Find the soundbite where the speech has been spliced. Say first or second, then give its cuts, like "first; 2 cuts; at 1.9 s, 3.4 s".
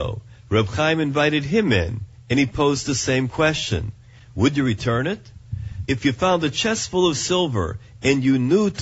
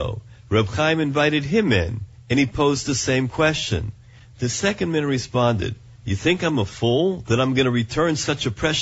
first; 2 cuts; at 4.2 s, 5.8 s